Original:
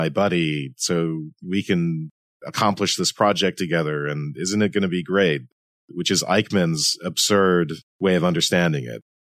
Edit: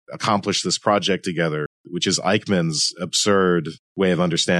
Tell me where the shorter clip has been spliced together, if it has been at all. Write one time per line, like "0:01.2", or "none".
0:01.7